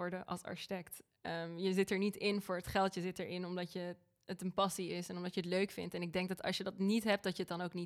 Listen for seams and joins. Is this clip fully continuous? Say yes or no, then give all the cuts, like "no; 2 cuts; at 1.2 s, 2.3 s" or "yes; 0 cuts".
yes; 0 cuts